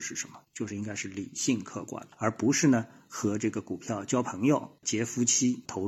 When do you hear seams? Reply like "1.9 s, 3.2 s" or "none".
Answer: 2.1 s, 4.8 s